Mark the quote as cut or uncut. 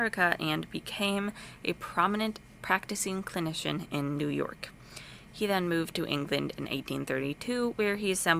uncut